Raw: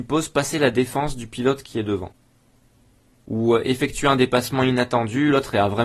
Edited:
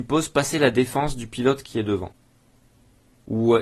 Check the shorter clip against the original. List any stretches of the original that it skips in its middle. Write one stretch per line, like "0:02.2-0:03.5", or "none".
none